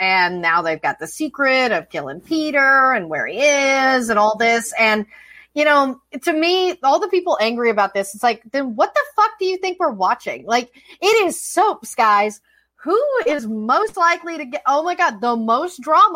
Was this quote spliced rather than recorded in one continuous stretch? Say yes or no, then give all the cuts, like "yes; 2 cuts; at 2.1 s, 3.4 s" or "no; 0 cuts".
no; 0 cuts